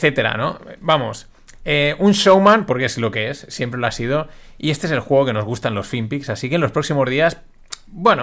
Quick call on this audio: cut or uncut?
uncut